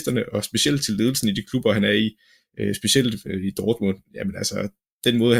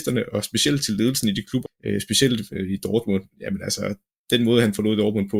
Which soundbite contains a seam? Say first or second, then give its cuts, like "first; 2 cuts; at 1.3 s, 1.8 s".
second; 1 cut; at 1.7 s